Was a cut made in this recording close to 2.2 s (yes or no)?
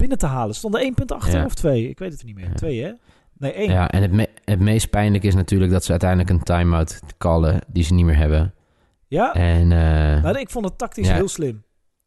yes